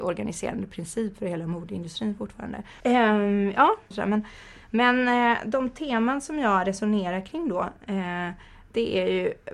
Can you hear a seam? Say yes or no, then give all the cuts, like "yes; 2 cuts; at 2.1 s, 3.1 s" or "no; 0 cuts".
yes; 2 cuts; at 2.8 s, 3.9 s